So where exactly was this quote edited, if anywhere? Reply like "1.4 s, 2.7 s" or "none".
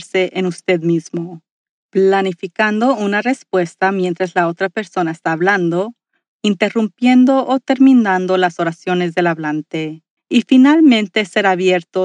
6.3 s, 10.2 s